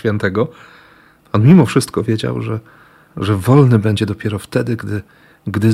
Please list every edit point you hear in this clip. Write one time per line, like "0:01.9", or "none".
none